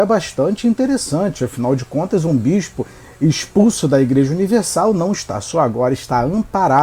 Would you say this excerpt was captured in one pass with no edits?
yes; 0 cuts

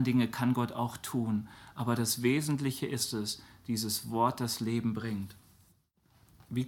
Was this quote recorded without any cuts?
yes; 0 cuts

